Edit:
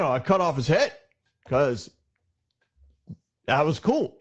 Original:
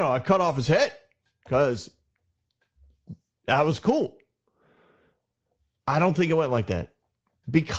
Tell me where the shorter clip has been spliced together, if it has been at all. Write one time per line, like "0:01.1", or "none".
none